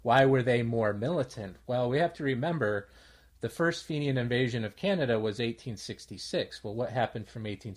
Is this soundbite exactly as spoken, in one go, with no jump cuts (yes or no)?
yes